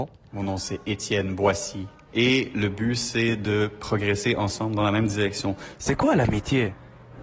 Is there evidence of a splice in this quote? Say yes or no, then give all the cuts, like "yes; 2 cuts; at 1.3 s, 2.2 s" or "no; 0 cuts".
yes; 2 cuts; at 2.1 s, 5.8 s